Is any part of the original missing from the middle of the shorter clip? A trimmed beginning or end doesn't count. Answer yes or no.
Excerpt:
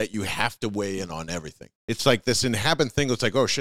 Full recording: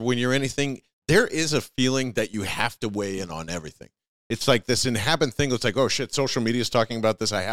yes